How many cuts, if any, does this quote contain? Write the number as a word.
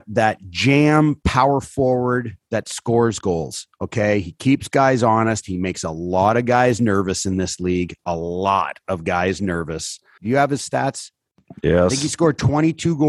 one